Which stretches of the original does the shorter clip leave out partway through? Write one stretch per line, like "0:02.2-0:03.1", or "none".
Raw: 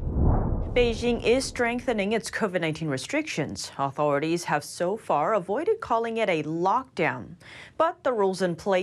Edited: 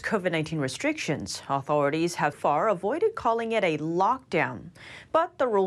0:04.6-0:05.0